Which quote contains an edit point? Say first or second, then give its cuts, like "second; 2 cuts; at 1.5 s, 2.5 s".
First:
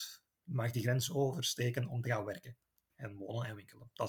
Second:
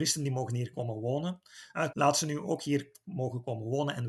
second; 1 cut; at 1.9 s